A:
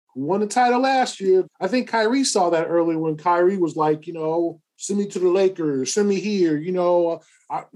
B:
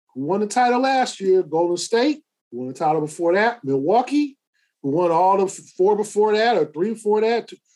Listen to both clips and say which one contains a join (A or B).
A